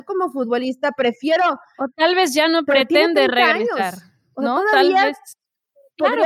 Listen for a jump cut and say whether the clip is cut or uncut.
uncut